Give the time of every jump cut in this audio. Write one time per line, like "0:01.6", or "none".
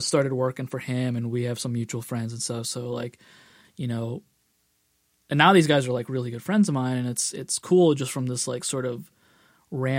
none